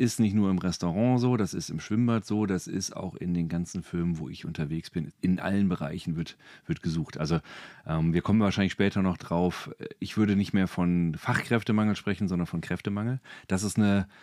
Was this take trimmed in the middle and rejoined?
no; 0 cuts

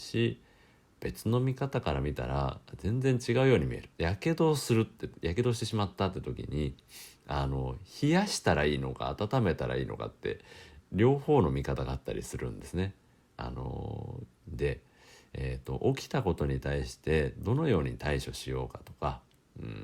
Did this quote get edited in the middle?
yes; 2 cuts; at 3.9 s, 14.3 s

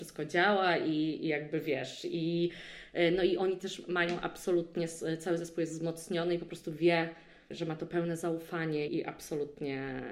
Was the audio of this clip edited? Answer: yes; 1 cut; at 8.9 s

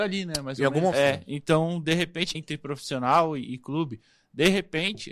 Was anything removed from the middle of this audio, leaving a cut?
yes; 2 cuts; at 0.9 s, 2.3 s

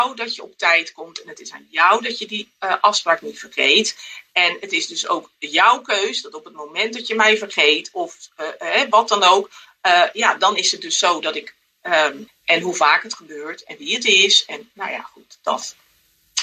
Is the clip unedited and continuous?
no; 1 cut; at 12.3 s

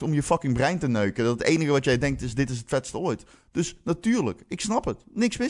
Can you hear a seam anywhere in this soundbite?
no; 0 cuts

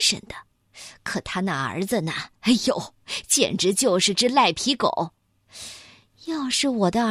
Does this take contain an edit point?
no; 0 cuts

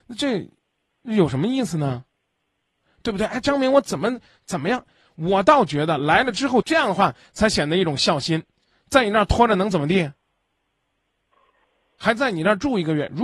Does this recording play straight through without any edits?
no; 1 cut; at 6.6 s

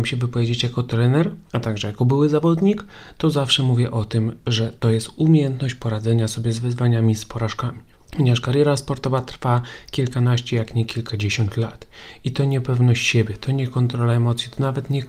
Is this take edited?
no; 0 cuts

